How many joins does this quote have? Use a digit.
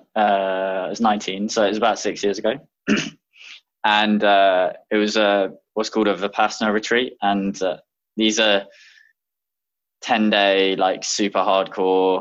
0